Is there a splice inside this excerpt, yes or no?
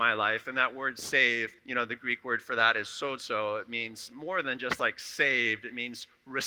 yes